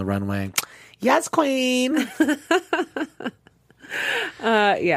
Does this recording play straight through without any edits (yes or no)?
yes